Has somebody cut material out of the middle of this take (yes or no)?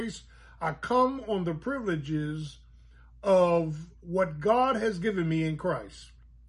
no